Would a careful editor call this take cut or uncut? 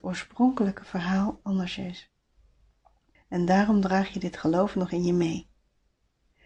cut